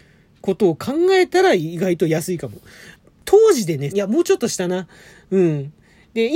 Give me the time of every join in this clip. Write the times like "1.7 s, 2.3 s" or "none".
3.9 s

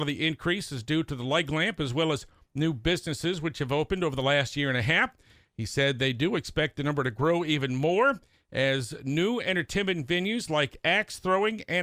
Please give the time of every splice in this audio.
none

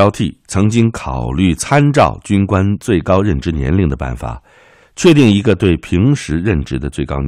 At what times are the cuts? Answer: none

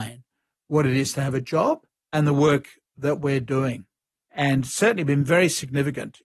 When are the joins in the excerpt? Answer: none

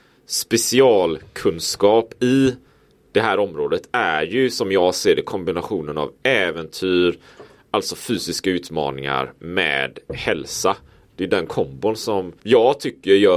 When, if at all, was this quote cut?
12.4 s

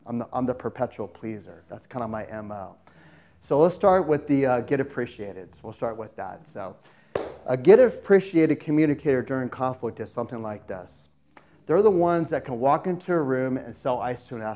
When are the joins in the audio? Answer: none

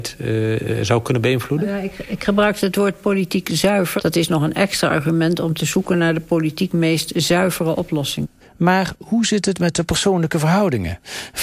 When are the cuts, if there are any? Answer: 4.0 s, 8.4 s

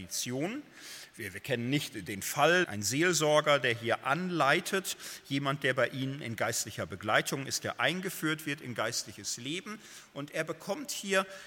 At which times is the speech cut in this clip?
2.6 s

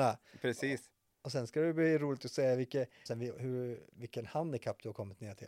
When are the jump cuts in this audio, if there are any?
3.1 s

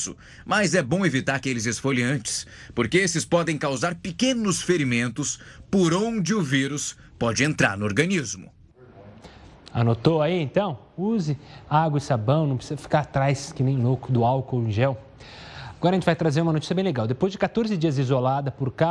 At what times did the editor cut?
none

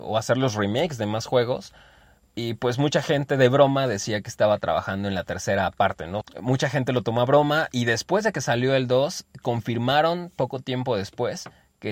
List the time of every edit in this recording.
6.2 s

